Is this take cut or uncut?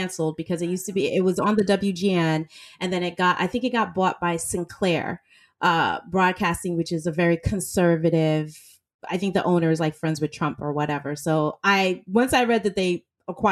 uncut